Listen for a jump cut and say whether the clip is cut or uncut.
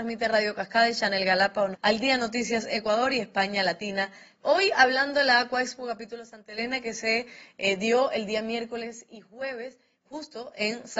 cut